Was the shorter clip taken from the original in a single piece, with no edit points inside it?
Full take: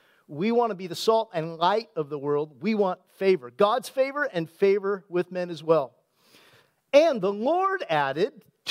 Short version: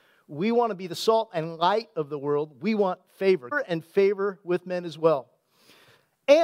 no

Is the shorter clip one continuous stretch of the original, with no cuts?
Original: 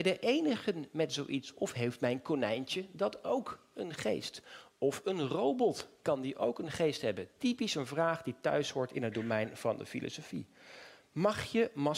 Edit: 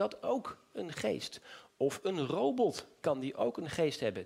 yes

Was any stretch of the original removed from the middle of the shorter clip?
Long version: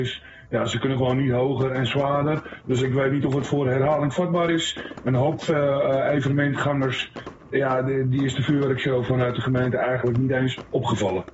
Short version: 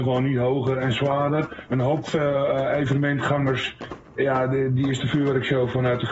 yes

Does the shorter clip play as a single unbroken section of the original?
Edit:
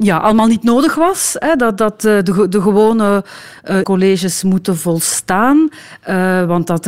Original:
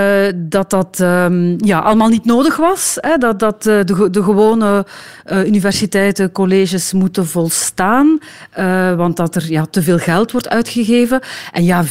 no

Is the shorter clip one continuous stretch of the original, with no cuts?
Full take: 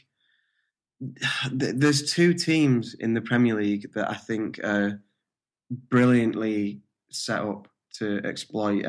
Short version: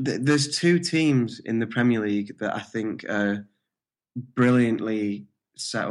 yes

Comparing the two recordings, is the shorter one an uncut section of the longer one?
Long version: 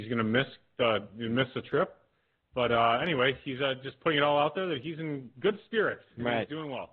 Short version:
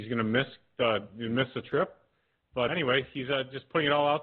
no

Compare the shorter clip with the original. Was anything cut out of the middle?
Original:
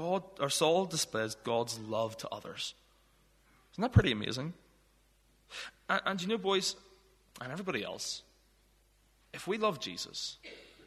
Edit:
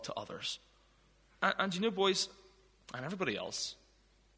yes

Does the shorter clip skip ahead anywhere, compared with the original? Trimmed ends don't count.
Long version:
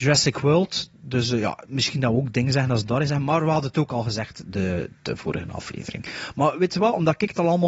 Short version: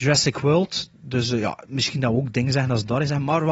no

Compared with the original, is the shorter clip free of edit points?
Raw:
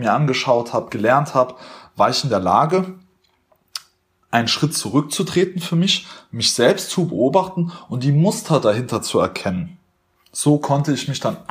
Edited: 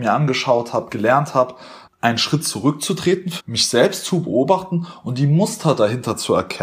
no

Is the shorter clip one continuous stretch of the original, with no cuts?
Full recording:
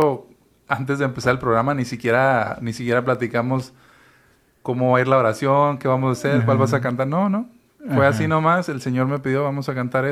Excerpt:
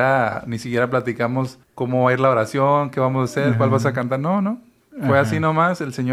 no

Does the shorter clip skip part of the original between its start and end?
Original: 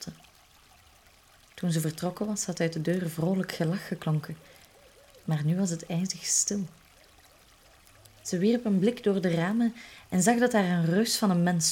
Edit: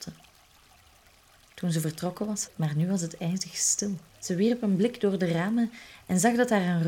yes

